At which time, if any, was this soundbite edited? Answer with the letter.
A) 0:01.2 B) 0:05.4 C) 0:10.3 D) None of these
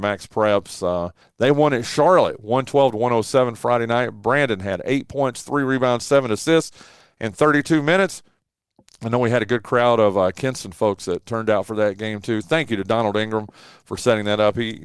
A